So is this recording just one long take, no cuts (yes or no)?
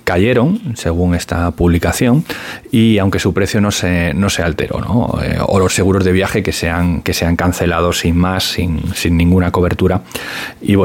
yes